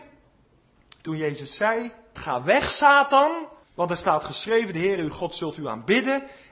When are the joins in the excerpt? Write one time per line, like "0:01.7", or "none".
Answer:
0:02.2
0:03.6